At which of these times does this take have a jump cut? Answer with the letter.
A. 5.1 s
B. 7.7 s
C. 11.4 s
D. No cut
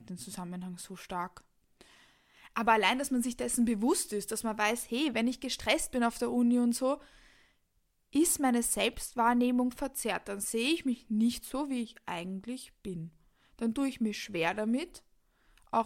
D